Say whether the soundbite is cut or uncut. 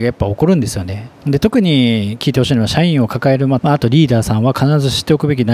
cut